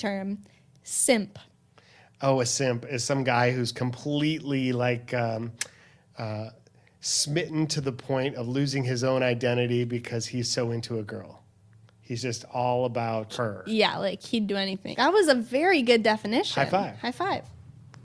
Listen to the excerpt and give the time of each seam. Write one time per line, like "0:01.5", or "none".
0:13.3
0:14.9

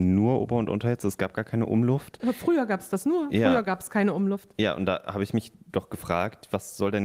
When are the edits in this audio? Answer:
none

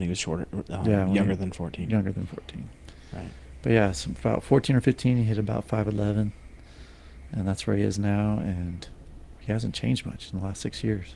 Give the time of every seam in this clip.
none

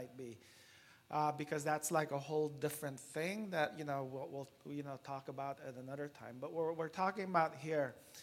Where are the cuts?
none

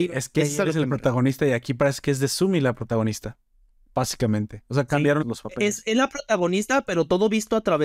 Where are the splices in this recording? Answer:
0:05.2

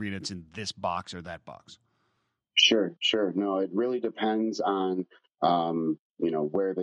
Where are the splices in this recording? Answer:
none

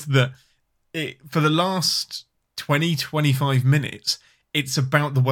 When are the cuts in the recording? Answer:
none

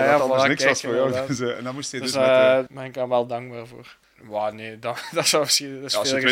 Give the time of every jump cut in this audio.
0:02.7
0:04.0

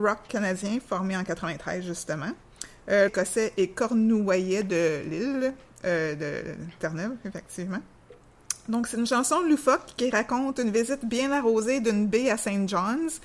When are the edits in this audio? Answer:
0:03.1

